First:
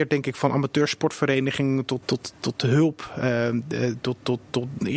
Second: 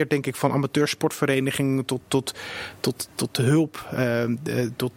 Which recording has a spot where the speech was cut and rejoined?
first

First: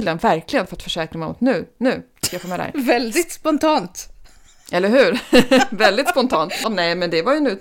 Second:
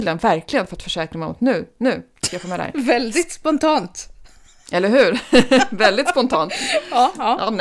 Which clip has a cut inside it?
first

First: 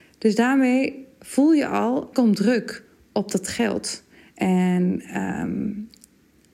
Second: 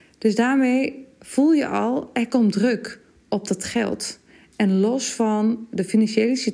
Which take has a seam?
first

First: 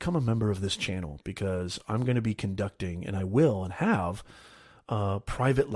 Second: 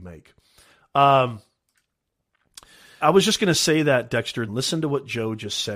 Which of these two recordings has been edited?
second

